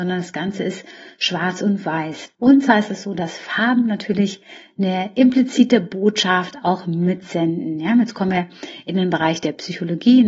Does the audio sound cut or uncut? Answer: cut